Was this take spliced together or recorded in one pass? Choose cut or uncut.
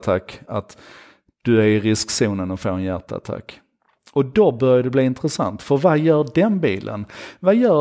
uncut